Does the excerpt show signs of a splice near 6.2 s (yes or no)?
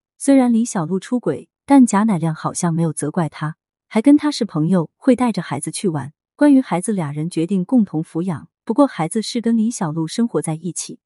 yes